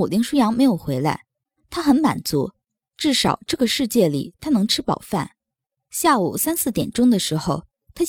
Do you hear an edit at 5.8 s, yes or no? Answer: no